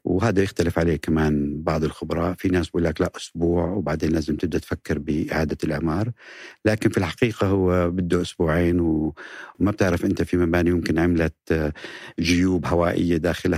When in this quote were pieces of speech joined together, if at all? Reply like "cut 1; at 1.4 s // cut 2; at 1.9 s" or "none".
cut 1; at 9.5 s